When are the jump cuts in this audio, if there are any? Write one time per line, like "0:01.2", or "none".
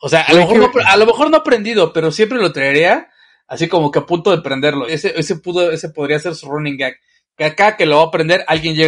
0:04.9